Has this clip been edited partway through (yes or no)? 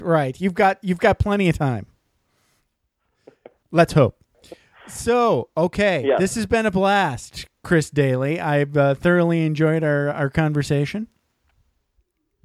no